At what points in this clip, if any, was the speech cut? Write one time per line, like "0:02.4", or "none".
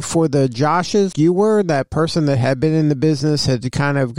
0:01.1